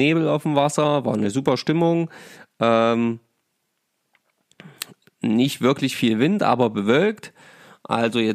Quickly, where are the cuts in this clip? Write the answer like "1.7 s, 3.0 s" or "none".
none